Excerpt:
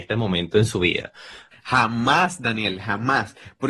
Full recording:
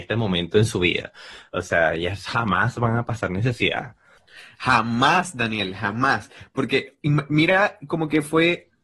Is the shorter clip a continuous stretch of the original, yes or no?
no